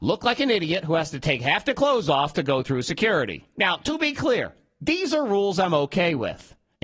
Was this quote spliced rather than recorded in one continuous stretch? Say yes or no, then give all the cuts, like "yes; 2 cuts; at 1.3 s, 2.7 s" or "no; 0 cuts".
no; 0 cuts